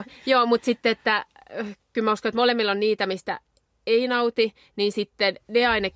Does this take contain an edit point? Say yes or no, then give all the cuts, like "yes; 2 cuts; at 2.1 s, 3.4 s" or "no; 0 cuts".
no; 0 cuts